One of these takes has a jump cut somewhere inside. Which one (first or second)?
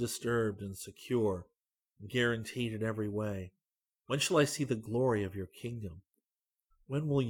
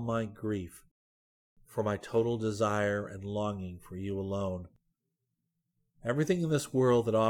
first